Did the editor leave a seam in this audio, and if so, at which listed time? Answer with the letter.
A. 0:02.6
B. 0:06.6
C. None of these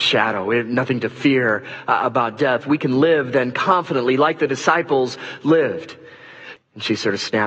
B